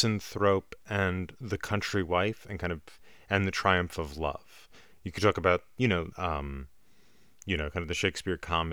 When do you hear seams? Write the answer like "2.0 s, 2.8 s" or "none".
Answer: 4.9 s, 6.1 s

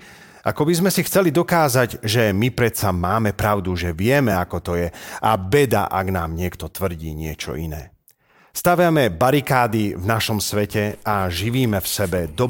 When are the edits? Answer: none

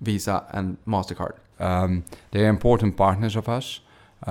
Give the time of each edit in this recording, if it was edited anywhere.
1.5 s

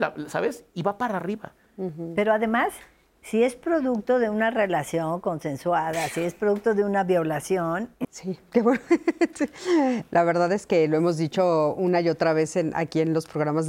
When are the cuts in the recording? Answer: 8.0 s

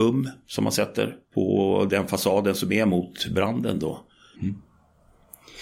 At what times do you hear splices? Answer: 1.2 s, 4.3 s

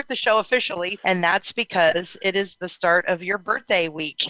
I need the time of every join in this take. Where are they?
1.0 s

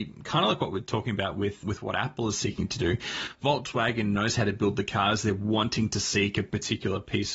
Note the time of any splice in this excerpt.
1.6 s

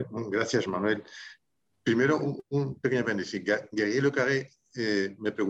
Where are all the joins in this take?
none

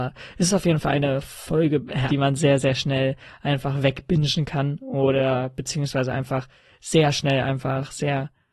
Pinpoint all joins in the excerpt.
2.1 s

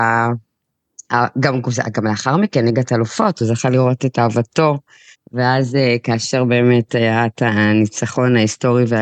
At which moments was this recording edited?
5.1 s

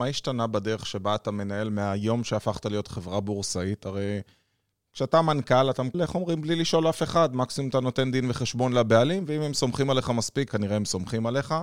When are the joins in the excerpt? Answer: 5.9 s, 10.5 s

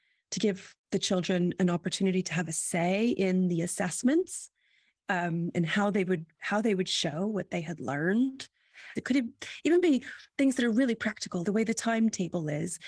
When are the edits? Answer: 9.0 s, 11.4 s

